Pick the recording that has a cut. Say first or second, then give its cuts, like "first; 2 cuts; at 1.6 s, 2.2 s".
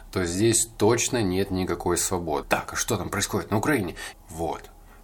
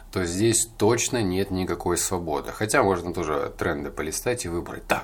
first; 2 cuts; at 2.4 s, 4.1 s